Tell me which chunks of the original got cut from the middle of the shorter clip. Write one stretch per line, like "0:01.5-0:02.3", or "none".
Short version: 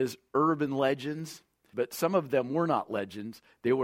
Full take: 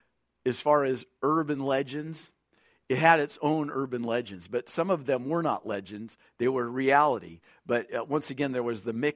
0:02.6-0:04.5